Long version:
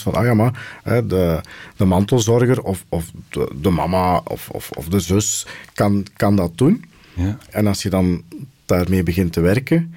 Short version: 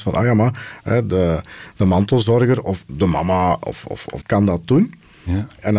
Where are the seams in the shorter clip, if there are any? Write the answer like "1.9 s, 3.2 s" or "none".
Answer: 2.9 s, 4.2 s